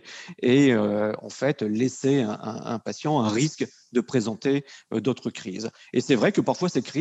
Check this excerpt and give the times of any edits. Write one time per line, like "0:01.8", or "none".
none

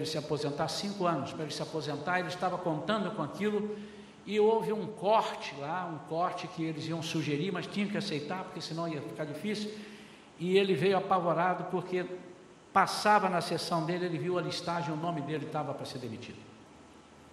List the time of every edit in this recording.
none

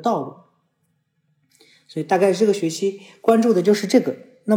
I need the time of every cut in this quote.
none

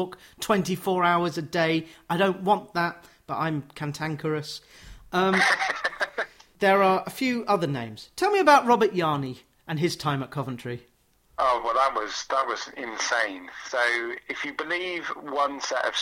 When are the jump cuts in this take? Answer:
none

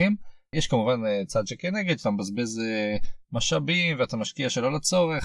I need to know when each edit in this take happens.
none

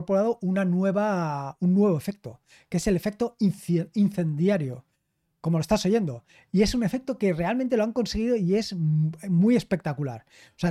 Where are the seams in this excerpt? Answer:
none

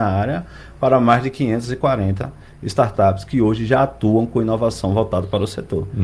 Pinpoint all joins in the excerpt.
none

